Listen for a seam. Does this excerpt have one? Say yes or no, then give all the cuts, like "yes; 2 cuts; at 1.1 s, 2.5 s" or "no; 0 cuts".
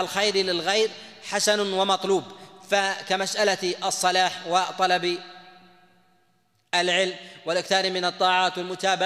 no; 0 cuts